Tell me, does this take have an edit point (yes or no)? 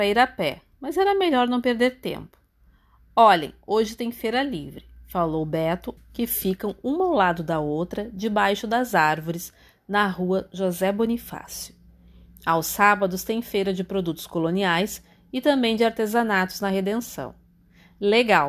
yes